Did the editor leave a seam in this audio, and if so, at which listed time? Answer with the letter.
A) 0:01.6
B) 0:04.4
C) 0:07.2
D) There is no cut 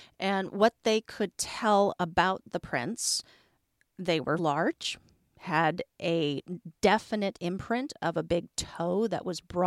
B